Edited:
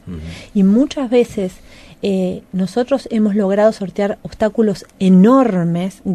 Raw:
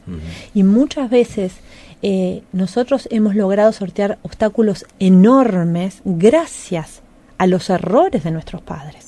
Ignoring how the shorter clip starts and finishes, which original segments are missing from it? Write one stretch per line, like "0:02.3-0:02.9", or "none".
none